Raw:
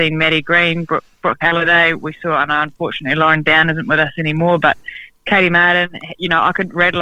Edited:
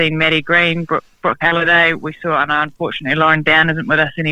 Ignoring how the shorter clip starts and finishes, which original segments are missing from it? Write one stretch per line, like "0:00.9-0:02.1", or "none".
none